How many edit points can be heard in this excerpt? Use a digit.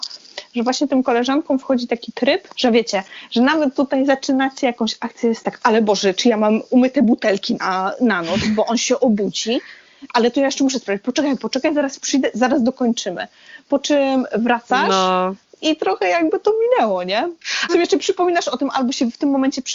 1